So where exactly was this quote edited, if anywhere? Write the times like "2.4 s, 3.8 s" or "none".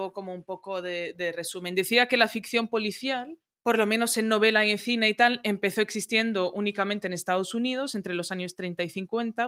none